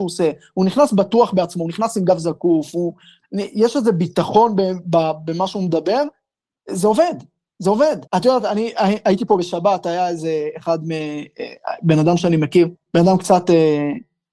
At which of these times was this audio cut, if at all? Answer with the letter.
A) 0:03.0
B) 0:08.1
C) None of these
B